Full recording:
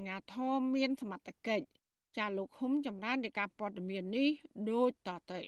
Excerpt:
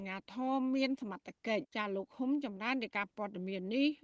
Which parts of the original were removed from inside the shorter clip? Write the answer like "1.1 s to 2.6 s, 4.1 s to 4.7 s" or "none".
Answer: 1.6 s to 2.1 s